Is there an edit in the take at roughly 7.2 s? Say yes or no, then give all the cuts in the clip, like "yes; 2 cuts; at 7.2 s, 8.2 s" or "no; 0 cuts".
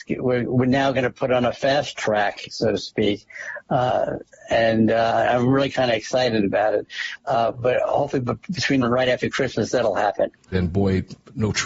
yes; 3 cuts; at 7.2 s, 8.8 s, 10.5 s